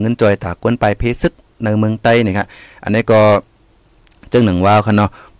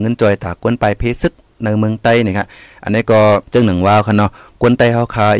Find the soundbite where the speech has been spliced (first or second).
second